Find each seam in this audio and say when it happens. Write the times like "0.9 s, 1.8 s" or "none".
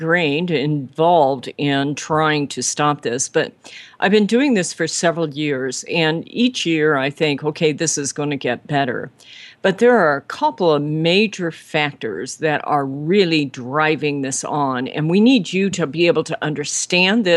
none